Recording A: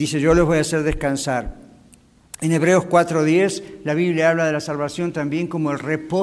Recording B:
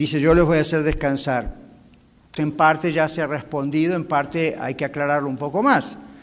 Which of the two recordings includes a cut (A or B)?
B